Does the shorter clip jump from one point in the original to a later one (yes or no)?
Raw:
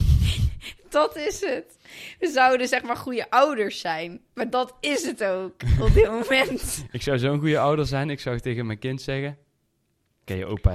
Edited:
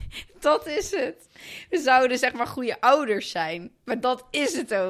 no